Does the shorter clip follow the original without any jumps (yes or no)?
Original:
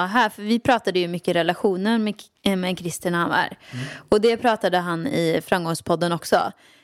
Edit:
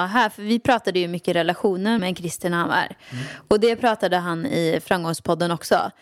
no